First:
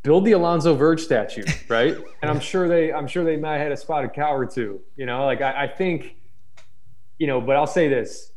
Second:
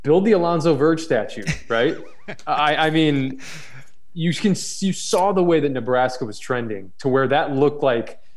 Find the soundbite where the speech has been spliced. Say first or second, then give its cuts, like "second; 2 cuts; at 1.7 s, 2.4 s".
first; 1 cut; at 2.2 s